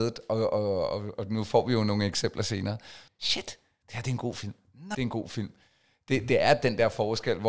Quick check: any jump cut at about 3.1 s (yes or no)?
yes